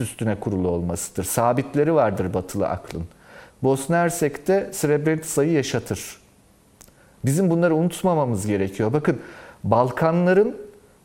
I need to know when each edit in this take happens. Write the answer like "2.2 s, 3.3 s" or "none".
3.5 s